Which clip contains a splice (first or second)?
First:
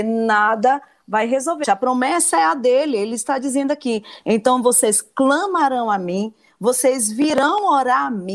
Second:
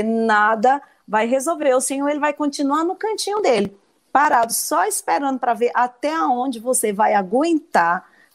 first